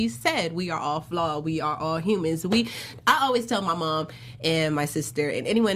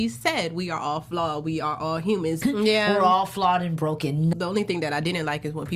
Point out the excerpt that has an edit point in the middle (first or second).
second